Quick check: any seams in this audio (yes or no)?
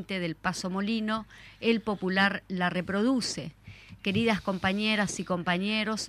no